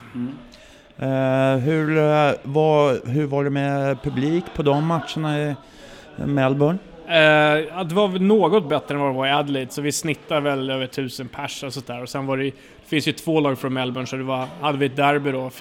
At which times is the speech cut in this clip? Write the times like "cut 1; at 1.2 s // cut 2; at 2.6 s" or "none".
none